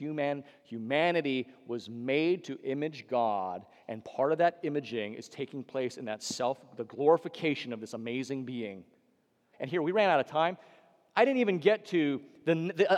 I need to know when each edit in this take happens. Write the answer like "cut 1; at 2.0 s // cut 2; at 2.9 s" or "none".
cut 1; at 9.5 s